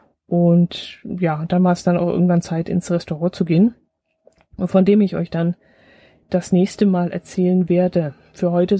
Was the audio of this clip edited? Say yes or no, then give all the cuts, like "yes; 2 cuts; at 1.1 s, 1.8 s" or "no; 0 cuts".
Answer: no; 0 cuts